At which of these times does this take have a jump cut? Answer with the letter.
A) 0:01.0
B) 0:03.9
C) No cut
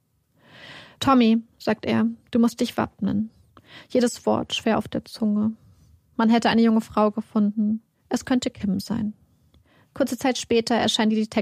A